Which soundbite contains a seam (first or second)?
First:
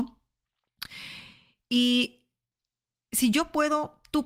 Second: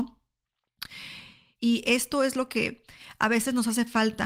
second